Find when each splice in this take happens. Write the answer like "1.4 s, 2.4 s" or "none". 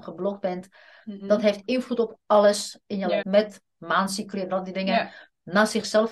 3.2 s